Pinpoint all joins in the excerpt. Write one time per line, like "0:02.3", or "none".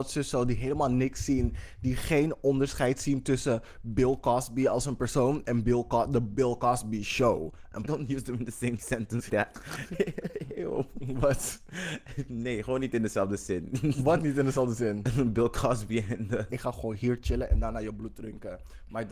0:07.8
0:09.3
0:16.5